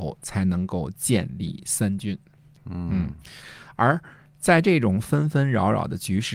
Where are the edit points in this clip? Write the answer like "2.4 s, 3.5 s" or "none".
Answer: 2.6 s